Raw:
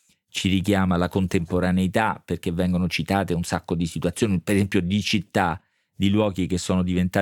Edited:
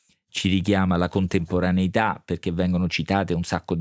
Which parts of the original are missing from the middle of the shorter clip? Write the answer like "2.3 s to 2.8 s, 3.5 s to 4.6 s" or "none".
none